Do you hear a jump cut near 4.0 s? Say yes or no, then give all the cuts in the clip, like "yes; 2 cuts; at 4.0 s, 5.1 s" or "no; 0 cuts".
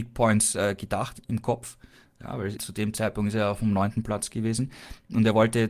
no; 1 cut; at 2.6 s